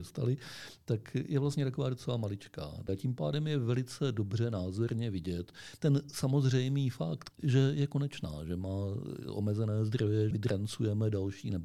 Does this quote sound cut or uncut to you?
cut